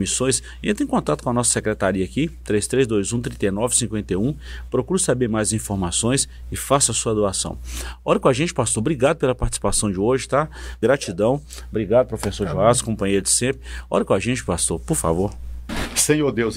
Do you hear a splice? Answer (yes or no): yes